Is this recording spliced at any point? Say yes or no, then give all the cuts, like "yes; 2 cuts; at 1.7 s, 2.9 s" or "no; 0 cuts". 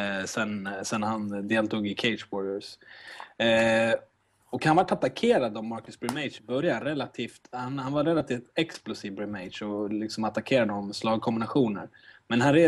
no; 0 cuts